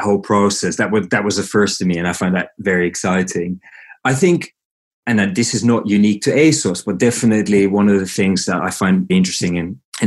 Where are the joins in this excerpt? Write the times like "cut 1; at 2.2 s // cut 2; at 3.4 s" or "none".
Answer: cut 1; at 9.1 s

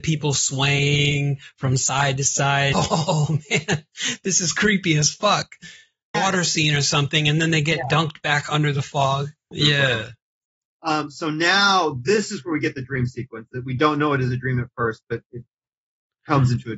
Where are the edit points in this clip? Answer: cut 1; at 2.7 s // cut 2; at 6.1 s // cut 3; at 9.5 s

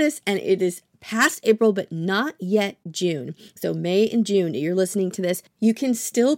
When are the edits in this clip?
none

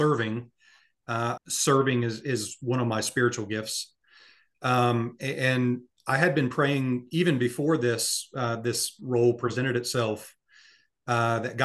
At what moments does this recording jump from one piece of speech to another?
cut 1; at 1.4 s

